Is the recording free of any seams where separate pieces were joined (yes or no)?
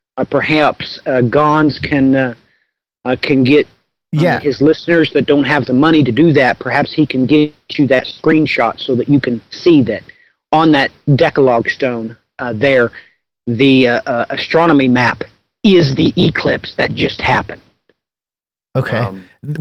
yes